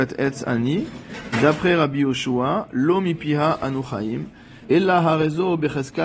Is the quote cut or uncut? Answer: cut